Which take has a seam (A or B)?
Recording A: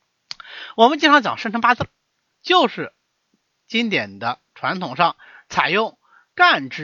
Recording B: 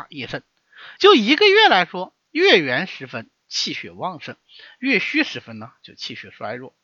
B